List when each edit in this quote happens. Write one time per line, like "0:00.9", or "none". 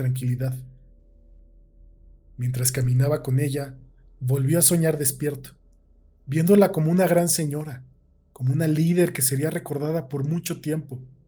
none